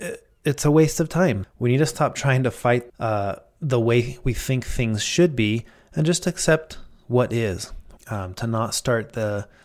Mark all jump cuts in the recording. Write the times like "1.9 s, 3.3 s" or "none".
1.4 s, 2.9 s, 8.0 s